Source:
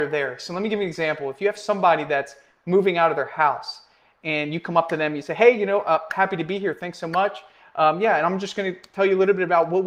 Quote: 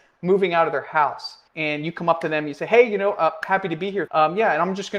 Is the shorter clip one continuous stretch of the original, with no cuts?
no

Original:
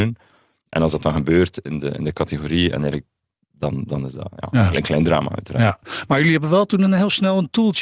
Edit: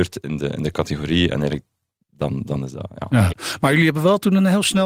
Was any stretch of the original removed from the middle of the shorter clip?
yes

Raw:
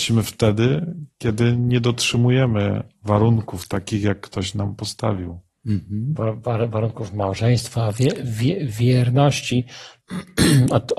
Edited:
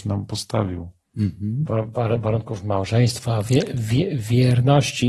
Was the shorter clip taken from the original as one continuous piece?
yes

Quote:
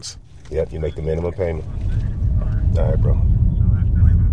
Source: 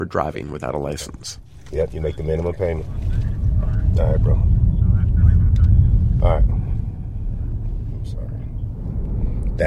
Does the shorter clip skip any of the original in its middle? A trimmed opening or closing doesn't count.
no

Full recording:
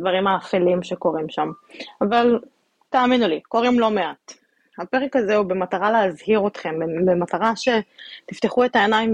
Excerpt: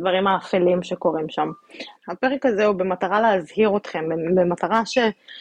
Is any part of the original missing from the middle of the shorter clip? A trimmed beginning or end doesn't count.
yes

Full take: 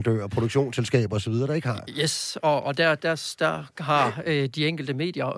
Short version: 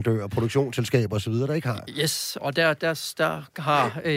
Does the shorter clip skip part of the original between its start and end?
yes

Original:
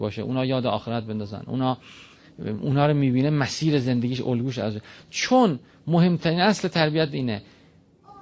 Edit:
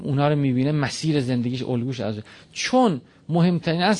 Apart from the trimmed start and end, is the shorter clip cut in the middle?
no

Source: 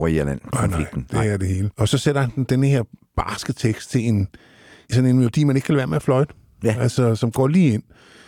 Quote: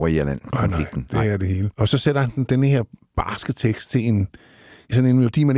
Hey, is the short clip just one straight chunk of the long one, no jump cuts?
yes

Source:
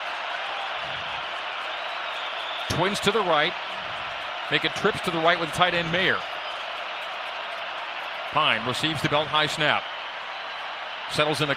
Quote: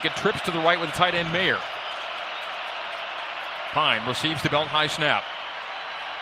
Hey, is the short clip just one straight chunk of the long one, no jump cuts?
yes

